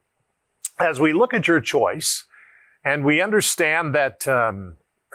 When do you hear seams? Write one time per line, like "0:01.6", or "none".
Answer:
none

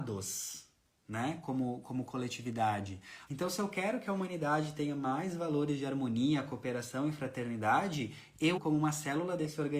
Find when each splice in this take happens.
0:03.3
0:08.6

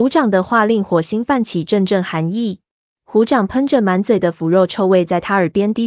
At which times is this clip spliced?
0:02.8

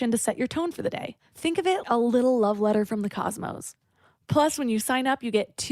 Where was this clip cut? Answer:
0:01.8

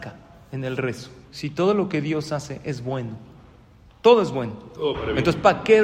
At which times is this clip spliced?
0:01.2

